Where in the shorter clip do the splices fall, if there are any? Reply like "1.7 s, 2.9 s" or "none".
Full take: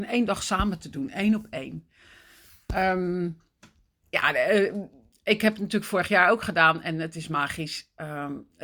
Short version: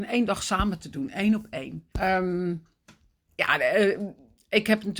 1.9 s